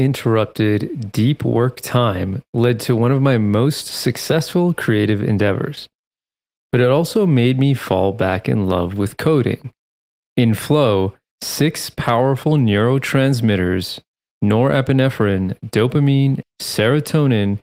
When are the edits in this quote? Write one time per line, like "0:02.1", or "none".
0:10.2
0:16.4